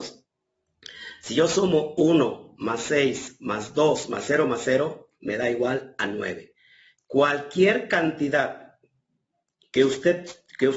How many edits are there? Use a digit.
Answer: 0